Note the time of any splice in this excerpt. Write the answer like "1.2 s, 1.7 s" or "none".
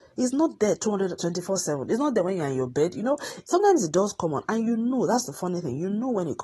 none